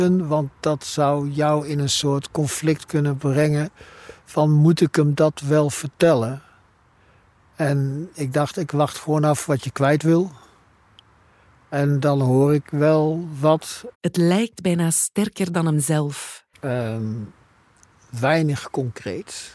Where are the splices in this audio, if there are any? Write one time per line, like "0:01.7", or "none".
0:13.9
0:16.5